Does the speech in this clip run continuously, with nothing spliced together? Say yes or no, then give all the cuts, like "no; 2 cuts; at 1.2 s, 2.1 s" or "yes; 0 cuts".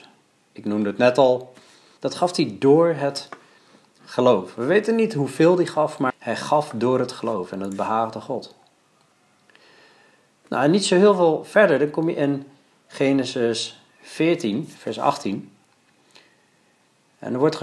no; 2 cuts; at 2.0 s, 6.1 s